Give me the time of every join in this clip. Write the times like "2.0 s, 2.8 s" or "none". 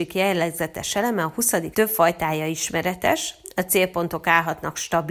1.7 s